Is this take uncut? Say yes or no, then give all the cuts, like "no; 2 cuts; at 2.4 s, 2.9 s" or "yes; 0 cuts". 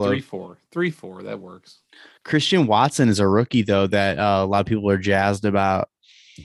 yes; 0 cuts